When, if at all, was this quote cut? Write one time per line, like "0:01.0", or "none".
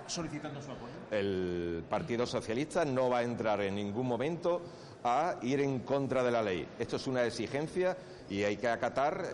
0:01.1